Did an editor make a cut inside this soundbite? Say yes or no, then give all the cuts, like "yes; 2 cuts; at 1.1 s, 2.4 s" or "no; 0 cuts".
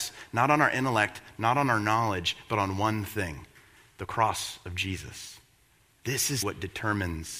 yes; 1 cut; at 6.4 s